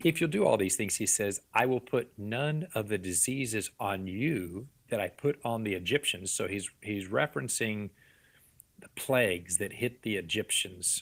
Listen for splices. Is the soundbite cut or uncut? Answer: uncut